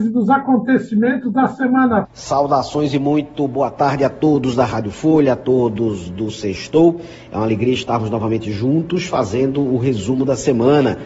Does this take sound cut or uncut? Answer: cut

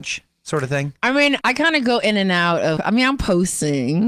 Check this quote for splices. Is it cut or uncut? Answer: cut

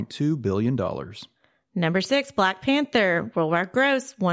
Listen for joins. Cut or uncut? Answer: uncut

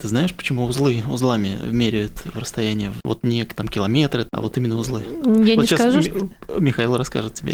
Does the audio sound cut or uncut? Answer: uncut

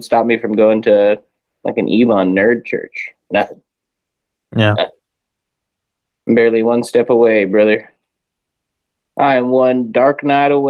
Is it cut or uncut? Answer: uncut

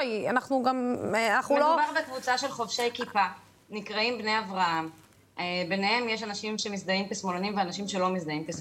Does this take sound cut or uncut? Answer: uncut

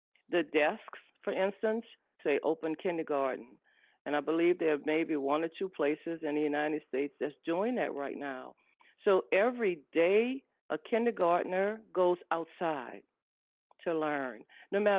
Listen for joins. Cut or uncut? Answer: cut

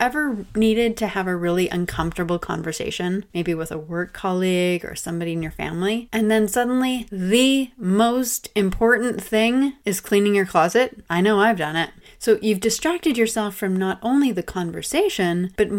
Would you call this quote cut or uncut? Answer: uncut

